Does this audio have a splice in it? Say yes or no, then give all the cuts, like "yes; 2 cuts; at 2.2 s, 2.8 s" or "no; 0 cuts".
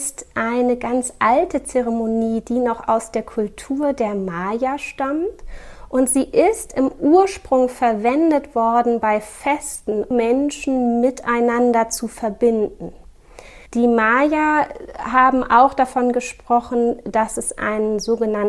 yes; 2 cuts; at 10.1 s, 13.7 s